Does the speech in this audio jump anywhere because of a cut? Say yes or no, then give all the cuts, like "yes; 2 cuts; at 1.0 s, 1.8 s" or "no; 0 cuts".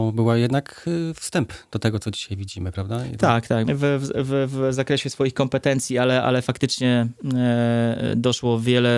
yes; 1 cut; at 3.6 s